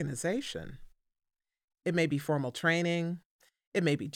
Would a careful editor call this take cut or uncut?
cut